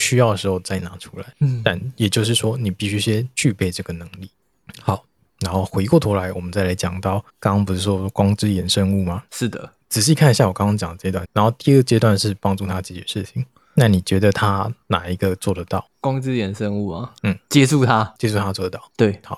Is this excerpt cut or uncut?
cut